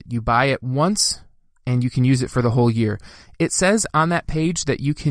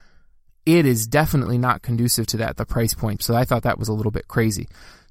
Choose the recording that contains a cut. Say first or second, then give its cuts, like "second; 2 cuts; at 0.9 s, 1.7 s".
second; 1 cut; at 3.2 s